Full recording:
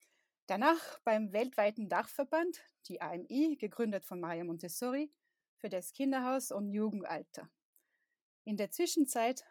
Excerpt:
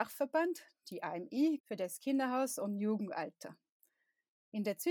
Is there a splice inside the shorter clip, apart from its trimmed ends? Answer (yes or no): yes